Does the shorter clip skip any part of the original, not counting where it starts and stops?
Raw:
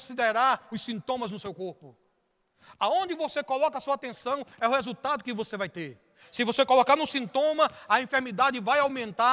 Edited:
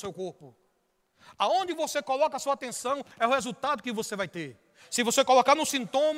no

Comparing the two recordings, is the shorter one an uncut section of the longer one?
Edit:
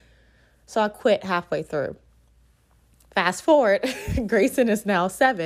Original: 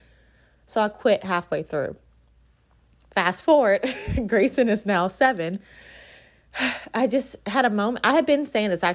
yes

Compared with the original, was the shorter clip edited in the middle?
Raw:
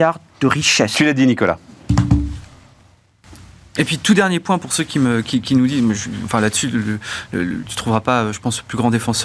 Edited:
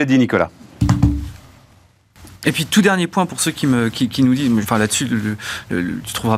yes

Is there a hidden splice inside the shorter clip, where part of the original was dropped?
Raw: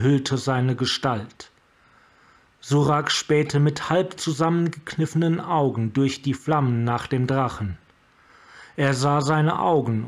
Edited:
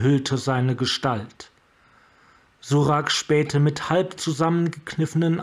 no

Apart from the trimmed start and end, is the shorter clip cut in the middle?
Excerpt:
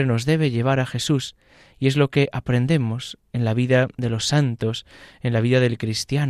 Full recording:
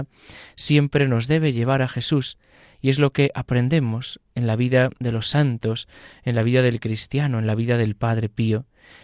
no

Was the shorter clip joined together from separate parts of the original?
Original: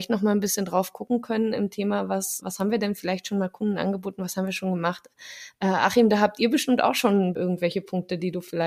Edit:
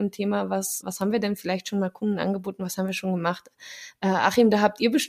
no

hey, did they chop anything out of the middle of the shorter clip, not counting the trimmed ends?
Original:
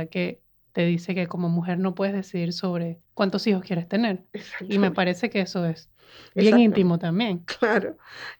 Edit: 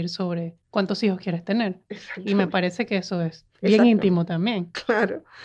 yes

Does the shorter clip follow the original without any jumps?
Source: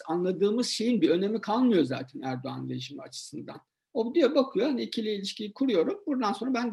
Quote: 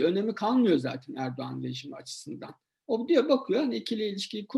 yes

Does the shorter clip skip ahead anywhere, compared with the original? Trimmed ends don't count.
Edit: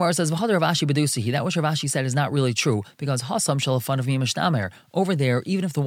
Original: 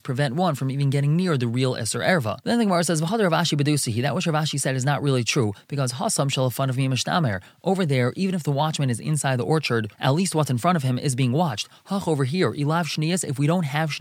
no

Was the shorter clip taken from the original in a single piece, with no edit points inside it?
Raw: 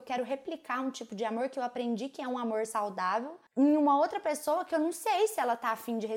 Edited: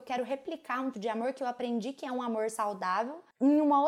no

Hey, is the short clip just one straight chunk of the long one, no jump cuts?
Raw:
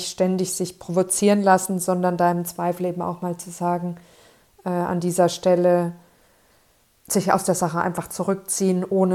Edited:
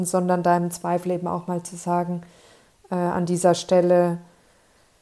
yes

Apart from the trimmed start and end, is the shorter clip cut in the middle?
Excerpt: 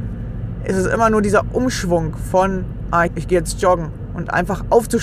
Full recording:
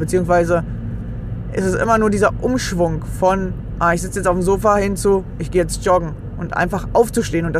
yes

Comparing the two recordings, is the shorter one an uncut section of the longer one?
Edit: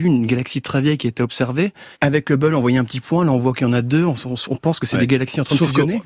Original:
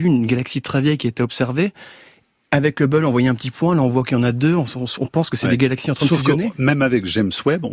no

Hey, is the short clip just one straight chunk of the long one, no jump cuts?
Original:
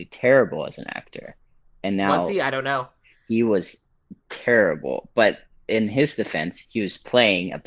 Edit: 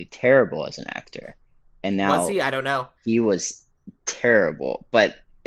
no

